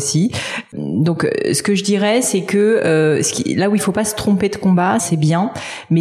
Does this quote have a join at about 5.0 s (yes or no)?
yes